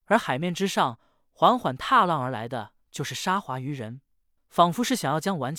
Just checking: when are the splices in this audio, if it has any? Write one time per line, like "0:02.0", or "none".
0:04.4